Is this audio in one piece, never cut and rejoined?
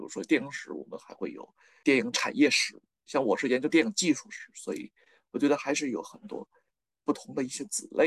yes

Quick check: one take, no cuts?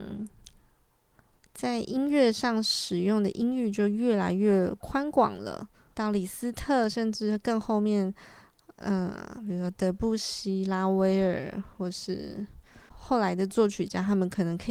no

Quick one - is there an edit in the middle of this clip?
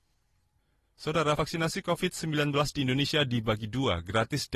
no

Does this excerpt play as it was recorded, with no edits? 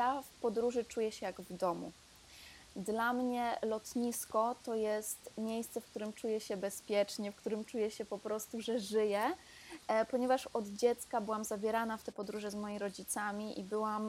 yes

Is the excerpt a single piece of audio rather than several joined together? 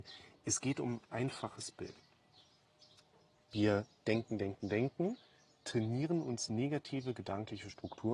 yes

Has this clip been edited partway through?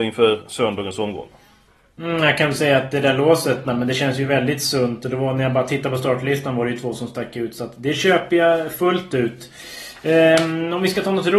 yes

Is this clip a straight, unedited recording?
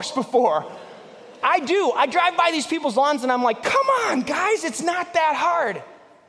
yes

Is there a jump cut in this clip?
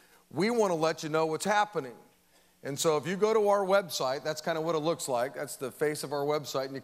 no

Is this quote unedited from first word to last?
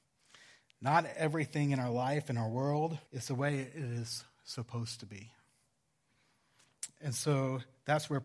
no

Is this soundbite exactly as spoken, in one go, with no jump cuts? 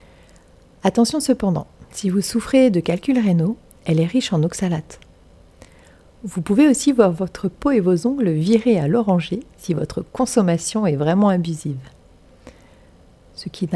yes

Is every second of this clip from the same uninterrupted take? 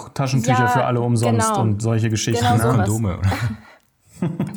yes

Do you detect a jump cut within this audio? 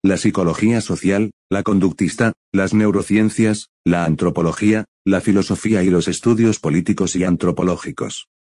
no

